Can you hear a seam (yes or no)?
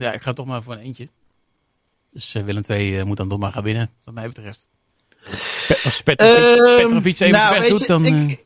no